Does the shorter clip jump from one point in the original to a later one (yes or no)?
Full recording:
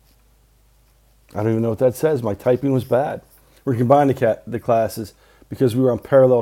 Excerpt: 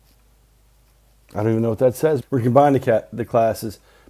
yes